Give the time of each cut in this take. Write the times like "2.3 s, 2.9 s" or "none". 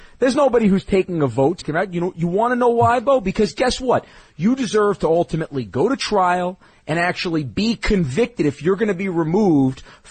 1.6 s